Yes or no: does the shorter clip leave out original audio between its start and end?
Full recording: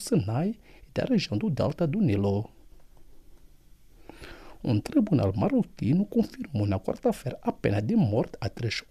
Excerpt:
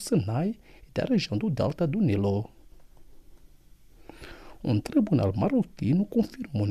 no